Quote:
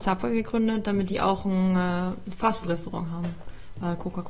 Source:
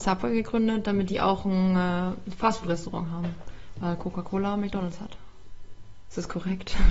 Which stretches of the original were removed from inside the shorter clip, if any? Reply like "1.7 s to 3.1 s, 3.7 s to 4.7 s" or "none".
none